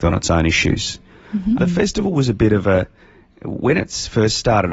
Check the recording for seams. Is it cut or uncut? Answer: cut